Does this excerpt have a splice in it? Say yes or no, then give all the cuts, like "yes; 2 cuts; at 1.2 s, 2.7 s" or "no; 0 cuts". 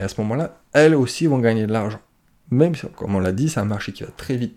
no; 0 cuts